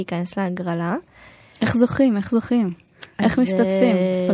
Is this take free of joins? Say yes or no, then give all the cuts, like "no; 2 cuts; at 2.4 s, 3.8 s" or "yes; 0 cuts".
yes; 0 cuts